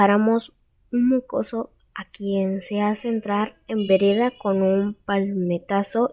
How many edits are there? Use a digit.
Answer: 1